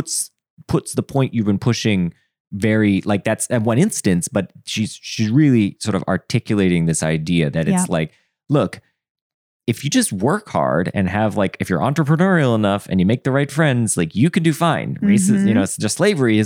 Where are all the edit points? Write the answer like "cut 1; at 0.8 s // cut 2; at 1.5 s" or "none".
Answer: none